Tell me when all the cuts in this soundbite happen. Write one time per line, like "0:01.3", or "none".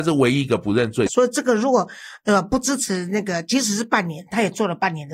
0:01.1